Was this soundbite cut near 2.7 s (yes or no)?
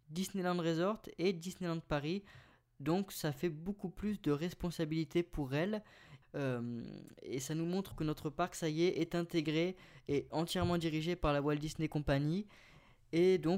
no